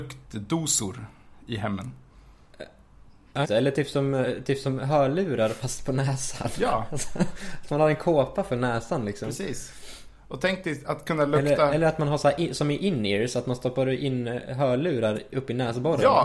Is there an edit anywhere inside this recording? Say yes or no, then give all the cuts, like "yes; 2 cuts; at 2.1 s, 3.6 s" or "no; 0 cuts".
yes; 1 cut; at 3.4 s